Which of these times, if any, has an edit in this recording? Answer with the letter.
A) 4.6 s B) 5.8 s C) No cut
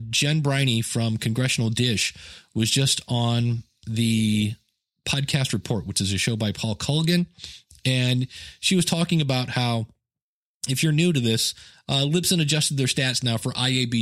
C